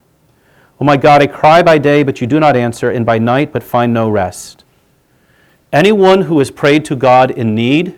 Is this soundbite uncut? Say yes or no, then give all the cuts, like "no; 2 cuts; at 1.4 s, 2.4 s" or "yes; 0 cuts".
yes; 0 cuts